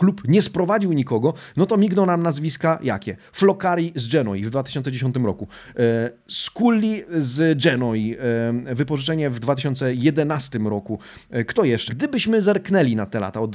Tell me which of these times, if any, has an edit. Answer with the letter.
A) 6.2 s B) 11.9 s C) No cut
B